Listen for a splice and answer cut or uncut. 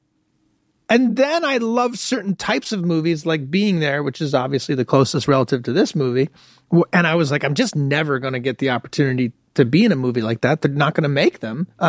uncut